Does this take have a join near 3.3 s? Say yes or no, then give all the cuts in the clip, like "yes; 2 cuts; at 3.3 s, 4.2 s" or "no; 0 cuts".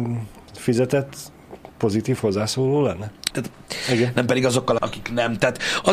yes; 2 cuts; at 3.3 s, 4.8 s